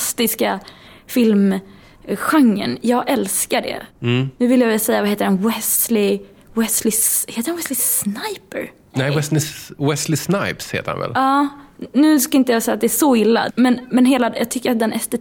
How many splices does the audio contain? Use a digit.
1